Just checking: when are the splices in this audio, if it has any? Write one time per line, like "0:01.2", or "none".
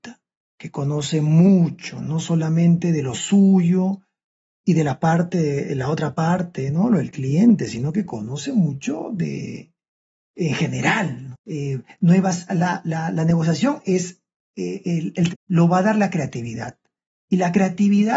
0:11.3
0:12.5
0:15.3

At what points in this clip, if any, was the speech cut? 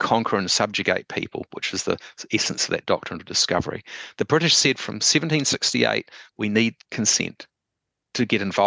none

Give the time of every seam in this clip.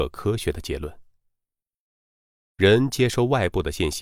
0:02.4

